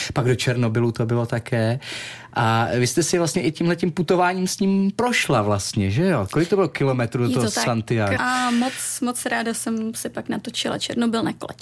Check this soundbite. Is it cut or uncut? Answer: cut